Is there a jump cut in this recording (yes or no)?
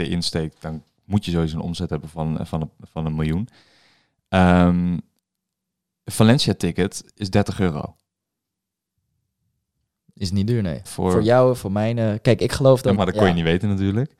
yes